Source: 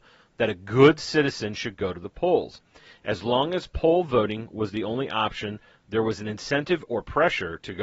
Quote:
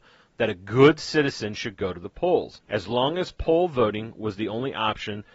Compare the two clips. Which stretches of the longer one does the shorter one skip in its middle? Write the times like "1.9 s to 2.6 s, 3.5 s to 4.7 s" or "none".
2.6 s to 3.0 s